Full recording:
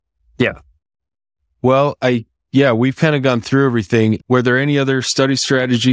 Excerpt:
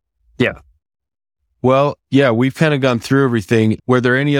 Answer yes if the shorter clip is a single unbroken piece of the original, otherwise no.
no